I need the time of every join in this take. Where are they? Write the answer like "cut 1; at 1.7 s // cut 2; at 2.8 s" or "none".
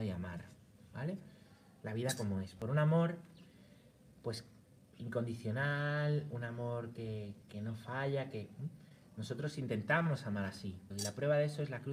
cut 1; at 10.9 s